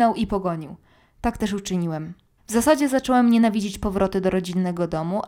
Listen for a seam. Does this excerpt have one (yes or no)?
yes